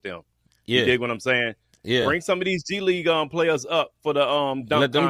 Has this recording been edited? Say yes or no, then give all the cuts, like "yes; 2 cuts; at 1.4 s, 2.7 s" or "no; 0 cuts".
no; 0 cuts